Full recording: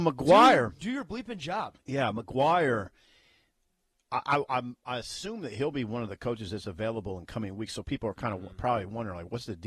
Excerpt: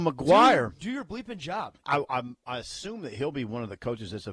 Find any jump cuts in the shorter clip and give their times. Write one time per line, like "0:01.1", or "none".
0:01.8